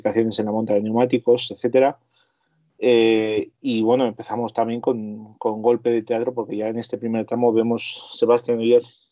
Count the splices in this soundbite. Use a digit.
0